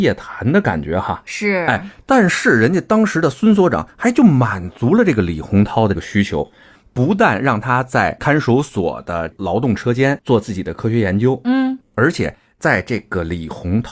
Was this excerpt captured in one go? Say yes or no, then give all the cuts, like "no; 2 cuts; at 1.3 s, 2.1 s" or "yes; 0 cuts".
yes; 0 cuts